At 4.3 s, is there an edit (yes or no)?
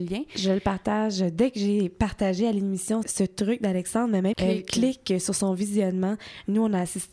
yes